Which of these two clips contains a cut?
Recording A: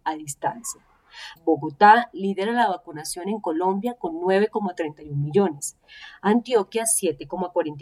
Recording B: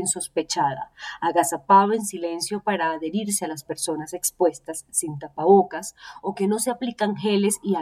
A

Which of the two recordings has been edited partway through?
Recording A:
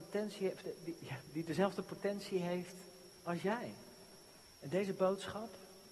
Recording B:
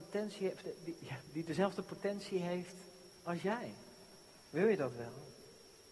A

